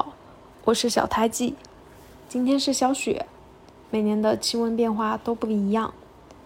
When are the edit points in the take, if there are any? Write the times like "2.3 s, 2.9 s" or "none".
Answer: none